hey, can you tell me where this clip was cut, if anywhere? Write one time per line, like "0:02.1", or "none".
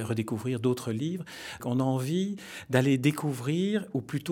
0:01.6